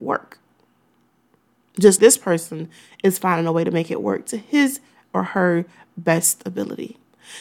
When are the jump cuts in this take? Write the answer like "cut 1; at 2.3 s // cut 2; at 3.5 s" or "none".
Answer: cut 1; at 2.0 s